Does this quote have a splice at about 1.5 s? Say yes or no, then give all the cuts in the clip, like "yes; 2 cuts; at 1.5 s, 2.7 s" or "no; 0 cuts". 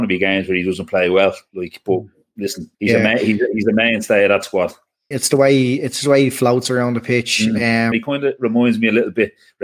no; 3 cuts; at 2.7 s, 5.1 s, 7.9 s